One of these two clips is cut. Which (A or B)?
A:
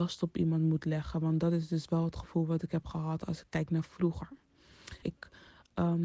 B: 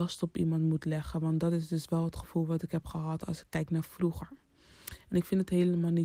A